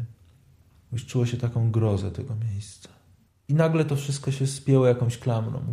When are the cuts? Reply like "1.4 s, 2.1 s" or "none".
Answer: 3.3 s